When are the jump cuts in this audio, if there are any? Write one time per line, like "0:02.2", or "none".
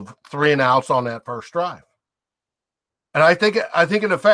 none